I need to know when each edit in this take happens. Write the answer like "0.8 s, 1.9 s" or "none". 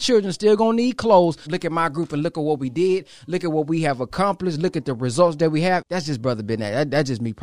1.5 s, 5.8 s